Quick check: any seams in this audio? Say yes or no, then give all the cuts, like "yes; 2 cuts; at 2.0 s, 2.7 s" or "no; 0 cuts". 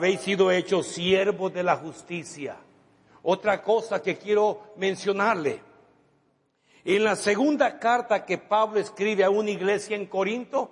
no; 0 cuts